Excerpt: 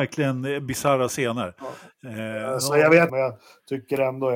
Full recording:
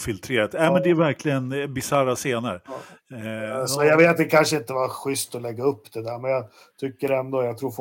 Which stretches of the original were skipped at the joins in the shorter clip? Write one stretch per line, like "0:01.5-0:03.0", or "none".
0:04.2-0:06.2